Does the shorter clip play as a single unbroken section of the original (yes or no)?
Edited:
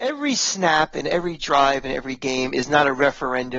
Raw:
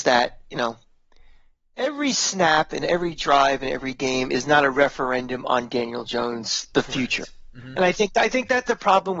yes